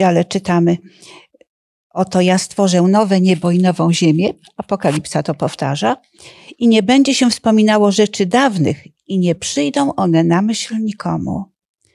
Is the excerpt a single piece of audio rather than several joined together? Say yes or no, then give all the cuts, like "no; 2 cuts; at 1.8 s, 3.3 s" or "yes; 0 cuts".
yes; 0 cuts